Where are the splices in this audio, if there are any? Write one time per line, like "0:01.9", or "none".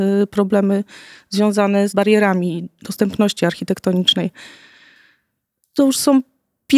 0:01.9